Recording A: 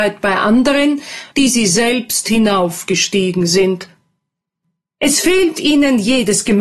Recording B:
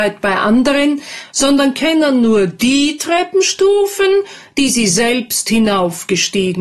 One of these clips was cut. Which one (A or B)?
A